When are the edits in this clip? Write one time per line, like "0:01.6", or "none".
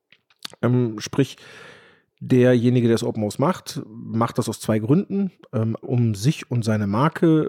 0:05.8